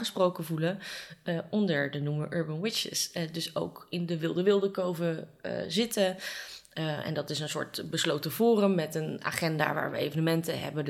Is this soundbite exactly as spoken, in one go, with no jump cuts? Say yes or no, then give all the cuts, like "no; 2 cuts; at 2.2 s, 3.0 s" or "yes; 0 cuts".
yes; 0 cuts